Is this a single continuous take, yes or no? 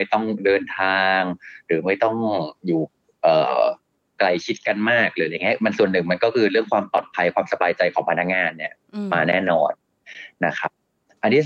yes